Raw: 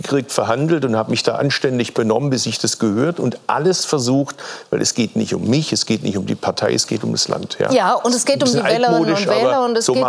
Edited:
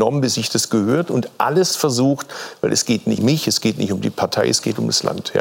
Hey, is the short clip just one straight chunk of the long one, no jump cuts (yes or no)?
no